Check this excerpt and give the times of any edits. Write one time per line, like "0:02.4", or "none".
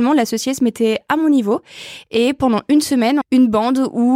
0:03.2